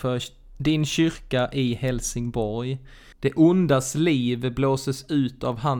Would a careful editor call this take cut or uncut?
cut